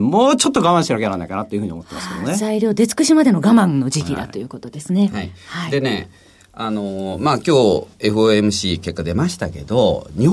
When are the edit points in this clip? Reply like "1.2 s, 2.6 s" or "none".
none